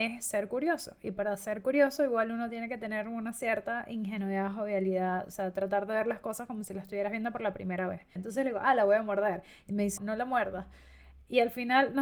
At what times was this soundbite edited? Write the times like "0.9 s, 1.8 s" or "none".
8.2 s, 10.0 s